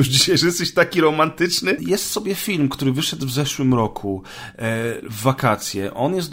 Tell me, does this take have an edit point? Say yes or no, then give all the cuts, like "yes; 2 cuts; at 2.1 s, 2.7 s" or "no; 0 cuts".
yes; 1 cut; at 1.8 s